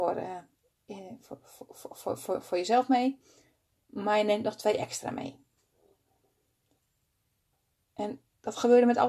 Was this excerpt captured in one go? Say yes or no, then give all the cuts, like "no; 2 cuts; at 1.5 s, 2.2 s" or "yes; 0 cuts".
yes; 0 cuts